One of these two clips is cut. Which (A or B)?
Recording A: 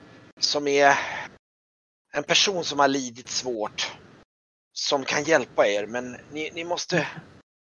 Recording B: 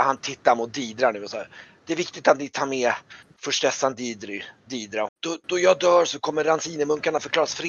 B